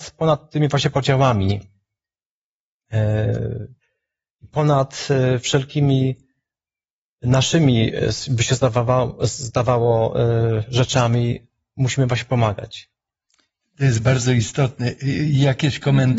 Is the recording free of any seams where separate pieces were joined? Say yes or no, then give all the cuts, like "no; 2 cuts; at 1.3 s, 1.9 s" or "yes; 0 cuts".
yes; 0 cuts